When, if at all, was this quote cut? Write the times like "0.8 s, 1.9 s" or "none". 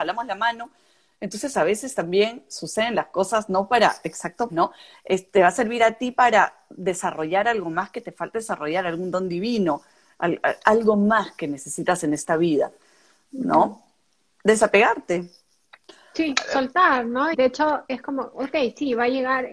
4.5 s, 17.3 s